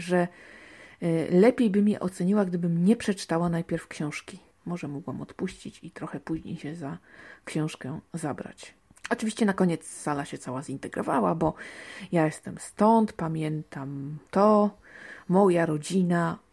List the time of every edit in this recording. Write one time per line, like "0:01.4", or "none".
0:04.6
0:14.3